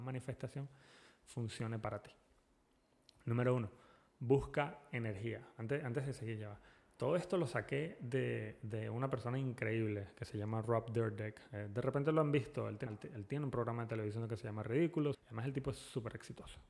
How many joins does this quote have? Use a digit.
2